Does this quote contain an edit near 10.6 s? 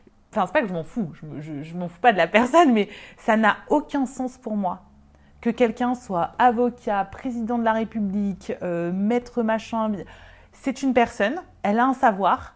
no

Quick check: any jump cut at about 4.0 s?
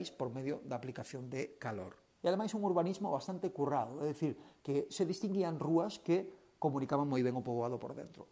no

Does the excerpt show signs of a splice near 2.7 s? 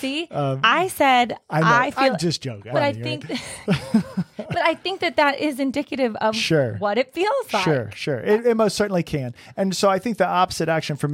yes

